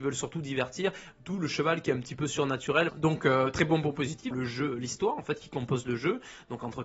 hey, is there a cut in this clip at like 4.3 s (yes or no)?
yes